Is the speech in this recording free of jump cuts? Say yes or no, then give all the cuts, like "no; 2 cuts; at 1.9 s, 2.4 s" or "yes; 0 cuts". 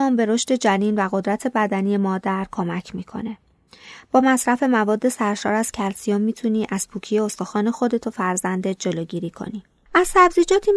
no; 1 cut; at 9.9 s